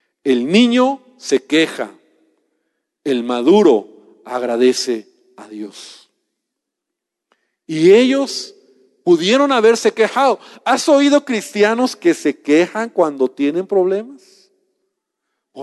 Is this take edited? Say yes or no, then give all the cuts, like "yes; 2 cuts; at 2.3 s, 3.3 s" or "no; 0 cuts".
no; 0 cuts